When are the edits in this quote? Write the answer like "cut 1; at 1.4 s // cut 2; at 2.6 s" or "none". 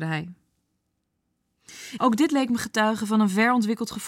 cut 1; at 2.0 s

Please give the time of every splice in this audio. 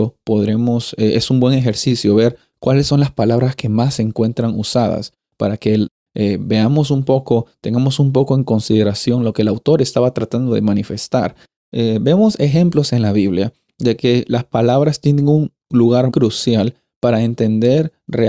cut 1; at 11.5 s // cut 2; at 16.1 s

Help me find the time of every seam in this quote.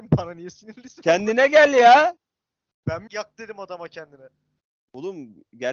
cut 1; at 3.1 s

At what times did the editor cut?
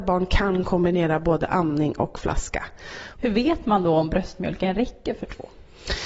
cut 1; at 3.1 s

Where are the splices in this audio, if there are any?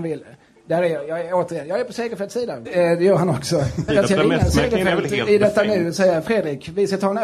cut 1; at 2.6 s // cut 2; at 3.9 s

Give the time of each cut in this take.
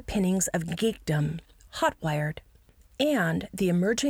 cut 1; at 1.7 s

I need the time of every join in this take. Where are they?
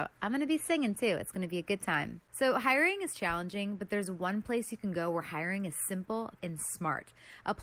cut 1; at 2.3 s // cut 2; at 6.4 s

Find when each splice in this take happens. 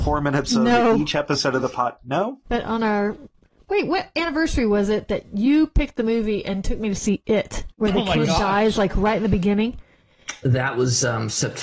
cut 1; at 2.4 s // cut 2; at 7.7 s

